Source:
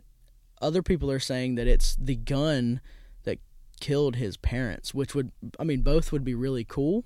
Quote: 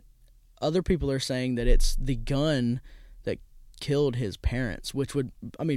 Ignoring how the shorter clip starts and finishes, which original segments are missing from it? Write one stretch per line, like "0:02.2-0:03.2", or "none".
none